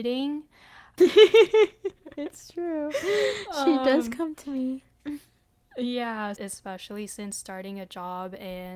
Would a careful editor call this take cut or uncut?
cut